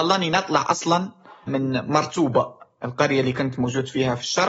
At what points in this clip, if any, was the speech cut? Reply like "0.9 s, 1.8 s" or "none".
1.5 s